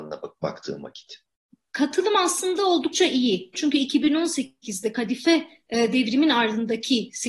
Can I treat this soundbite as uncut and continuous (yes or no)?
no